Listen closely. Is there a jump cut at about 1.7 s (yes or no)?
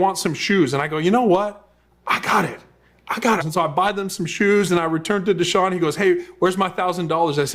no